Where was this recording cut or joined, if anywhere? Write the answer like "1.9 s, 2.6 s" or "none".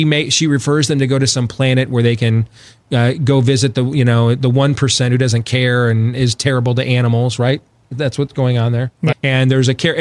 9.1 s